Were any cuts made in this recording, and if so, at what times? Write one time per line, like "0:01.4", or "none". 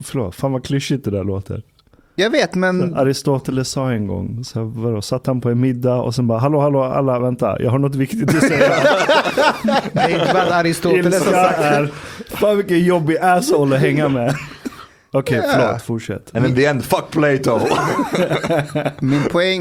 0:07.2